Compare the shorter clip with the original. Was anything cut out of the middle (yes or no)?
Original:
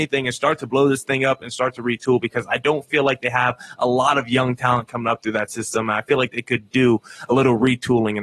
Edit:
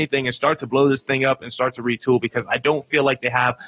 no